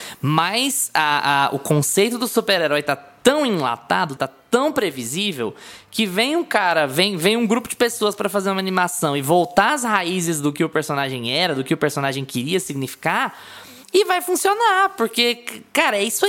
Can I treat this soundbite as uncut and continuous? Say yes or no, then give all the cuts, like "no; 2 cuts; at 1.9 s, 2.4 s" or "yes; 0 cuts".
no; 1 cut; at 4.2 s